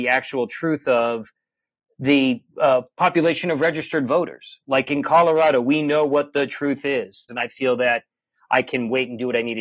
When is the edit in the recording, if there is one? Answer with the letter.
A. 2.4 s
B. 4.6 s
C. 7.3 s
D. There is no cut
C